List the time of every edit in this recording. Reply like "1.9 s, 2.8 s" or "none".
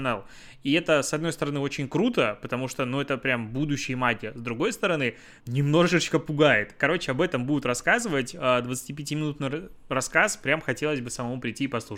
5.4 s